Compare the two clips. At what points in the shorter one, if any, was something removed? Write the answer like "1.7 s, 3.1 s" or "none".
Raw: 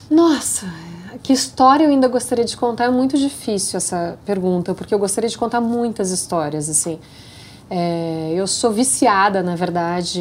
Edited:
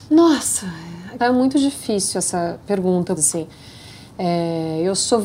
1.2 s, 3.2 s